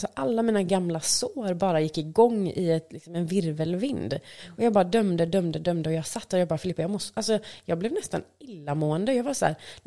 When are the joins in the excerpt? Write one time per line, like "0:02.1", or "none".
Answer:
none